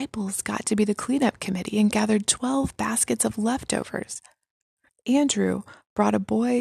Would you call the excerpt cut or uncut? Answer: cut